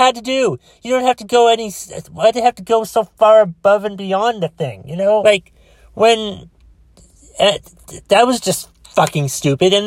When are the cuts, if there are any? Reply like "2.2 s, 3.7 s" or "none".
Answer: 5.2 s

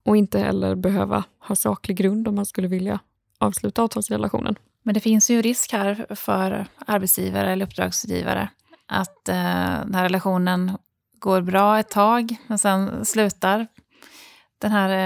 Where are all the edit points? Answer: none

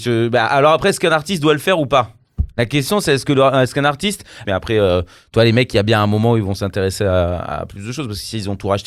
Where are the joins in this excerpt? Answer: 4.4 s

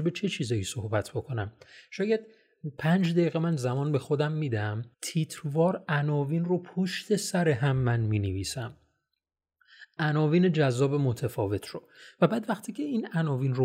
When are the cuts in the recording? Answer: 4.9 s

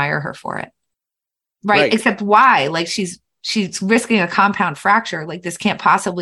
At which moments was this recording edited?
1.5 s

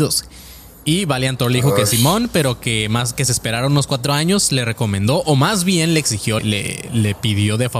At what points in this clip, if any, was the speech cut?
6.4 s

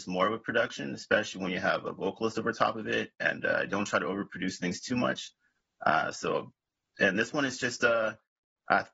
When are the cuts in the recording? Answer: none

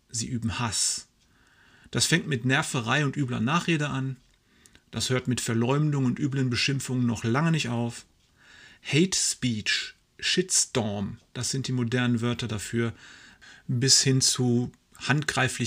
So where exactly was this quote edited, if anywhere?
none

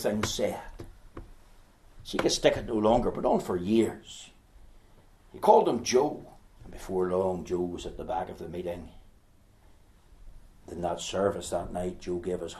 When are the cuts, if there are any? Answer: 6.6 s

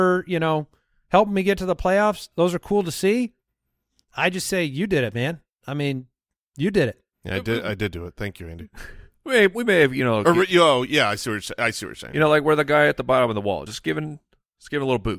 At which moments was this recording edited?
none

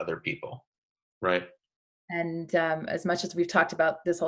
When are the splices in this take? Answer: 1.1 s

